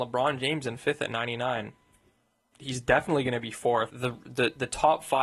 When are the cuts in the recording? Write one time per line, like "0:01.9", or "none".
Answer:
0:02.5
0:03.9

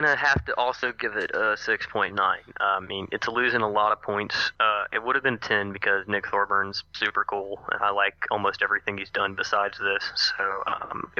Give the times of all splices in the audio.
0:04.5

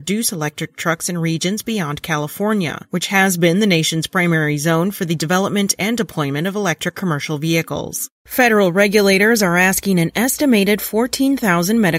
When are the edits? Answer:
0:08.2

